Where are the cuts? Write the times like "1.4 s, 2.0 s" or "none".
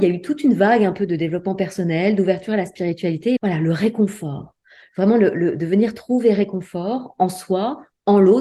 3.4 s